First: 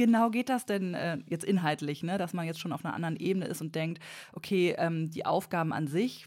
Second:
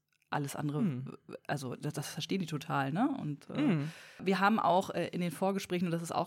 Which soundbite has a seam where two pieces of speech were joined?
second; 1 cut; at 4.2 s

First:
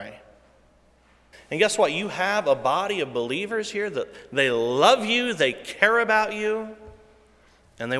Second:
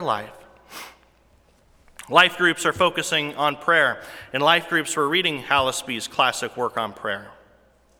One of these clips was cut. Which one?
first; 1 cut; at 1.3 s

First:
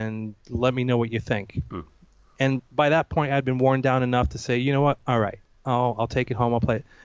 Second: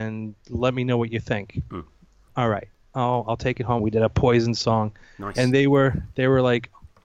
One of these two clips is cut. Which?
second; 2 cuts; at 2.3 s, 3.8 s

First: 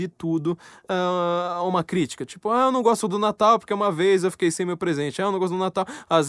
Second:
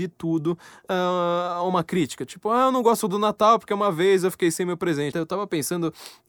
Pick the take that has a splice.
second; 1 cut; at 5.1 s

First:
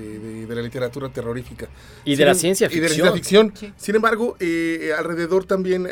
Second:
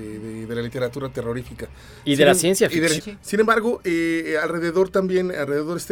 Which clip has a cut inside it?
second; 1 cut; at 3.0 s

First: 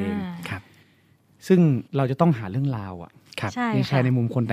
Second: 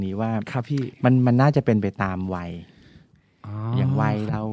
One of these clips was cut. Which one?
first; 1 cut; at 1.9 s

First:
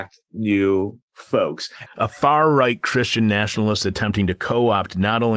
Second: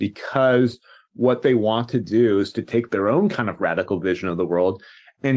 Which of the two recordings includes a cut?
first; 1 cut; at 1.9 s

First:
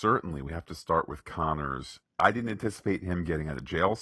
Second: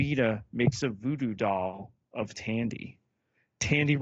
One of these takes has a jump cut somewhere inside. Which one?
first; 1 cut; at 2.0 s

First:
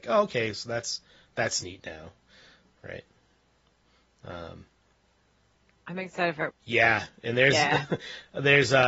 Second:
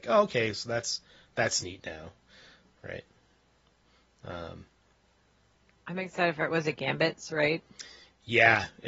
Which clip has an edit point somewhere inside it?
first; 1 cut; at 6.5 s

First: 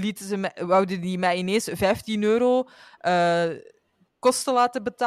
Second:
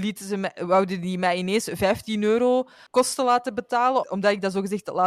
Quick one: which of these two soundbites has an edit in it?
second; 2 cuts; at 2.9 s, 4.0 s

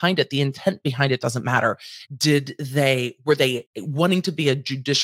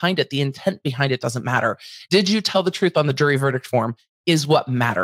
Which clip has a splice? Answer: first; 2 cuts; at 2.1 s, 3.7 s

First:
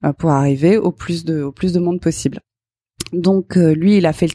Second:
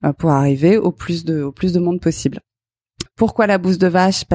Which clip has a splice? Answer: second; 1 cut; at 3.1 s

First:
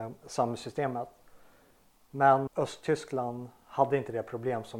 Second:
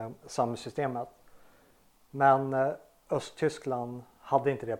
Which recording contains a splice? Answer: first; 1 cut; at 2.5 s

